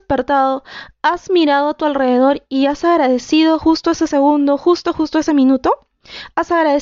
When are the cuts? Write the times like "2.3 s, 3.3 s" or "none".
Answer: 3.6 s